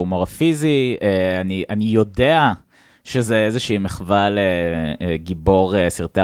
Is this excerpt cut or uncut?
uncut